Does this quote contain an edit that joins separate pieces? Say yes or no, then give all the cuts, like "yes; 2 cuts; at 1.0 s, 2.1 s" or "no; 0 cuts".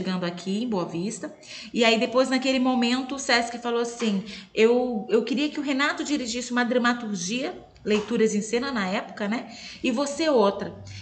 no; 0 cuts